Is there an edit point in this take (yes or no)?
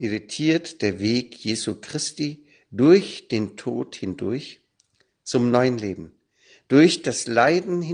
no